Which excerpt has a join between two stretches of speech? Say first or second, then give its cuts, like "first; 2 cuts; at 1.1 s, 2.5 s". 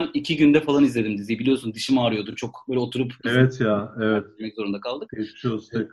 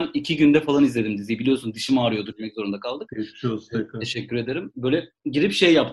second; 1 cut; at 2.3 s